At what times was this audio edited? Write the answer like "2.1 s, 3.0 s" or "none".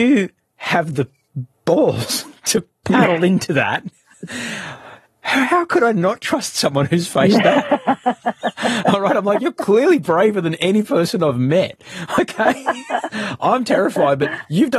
1.5 s